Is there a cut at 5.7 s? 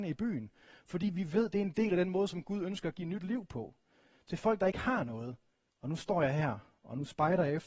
yes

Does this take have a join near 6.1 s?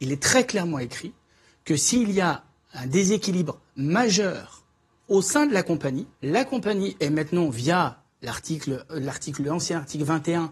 yes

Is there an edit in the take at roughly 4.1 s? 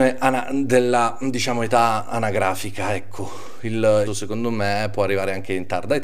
yes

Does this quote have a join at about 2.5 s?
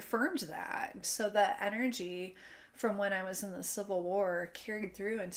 no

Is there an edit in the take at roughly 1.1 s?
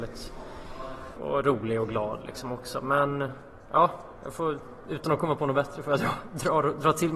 yes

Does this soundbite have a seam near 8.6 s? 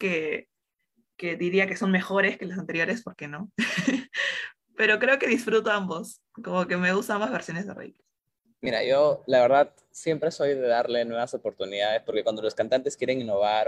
yes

